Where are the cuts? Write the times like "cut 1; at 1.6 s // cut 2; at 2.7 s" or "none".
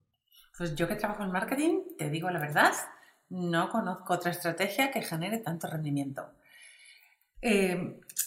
none